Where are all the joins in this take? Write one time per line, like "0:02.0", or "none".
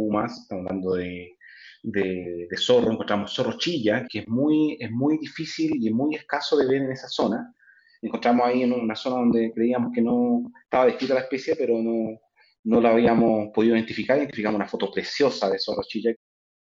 0:04.1